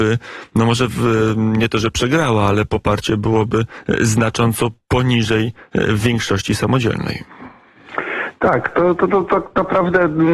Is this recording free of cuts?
yes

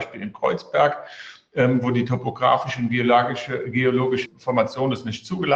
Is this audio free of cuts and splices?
no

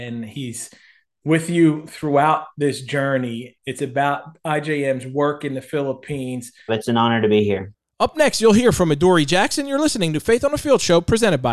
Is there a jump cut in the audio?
yes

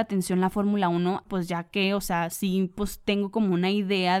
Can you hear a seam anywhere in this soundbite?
yes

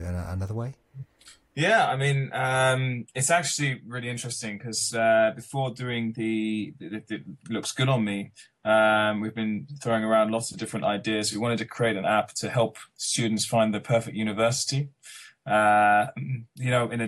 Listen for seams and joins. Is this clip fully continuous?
yes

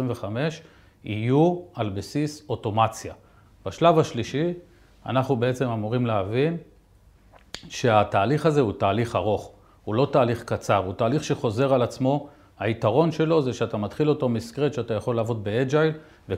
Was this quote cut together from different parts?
yes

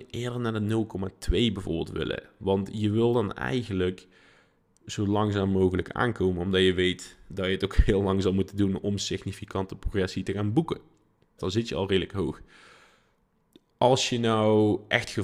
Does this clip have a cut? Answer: yes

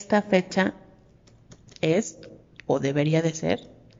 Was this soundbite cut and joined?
no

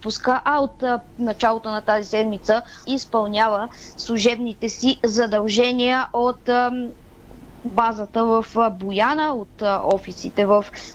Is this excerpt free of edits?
no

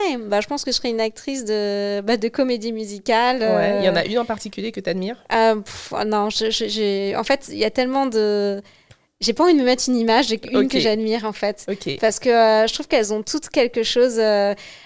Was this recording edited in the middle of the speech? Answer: no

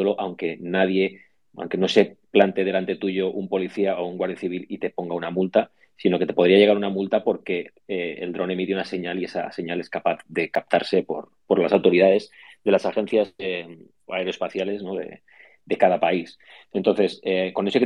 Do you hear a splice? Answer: yes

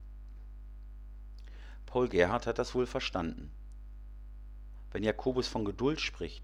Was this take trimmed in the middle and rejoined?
no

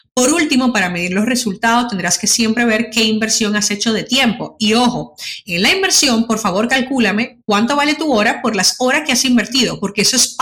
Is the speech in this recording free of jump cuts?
yes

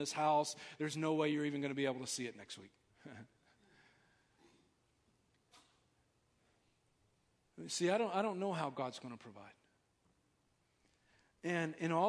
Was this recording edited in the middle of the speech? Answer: no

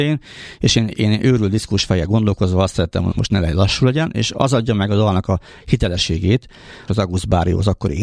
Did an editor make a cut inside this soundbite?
yes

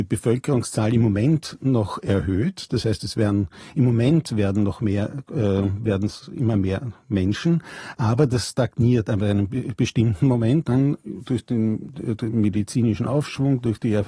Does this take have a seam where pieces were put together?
yes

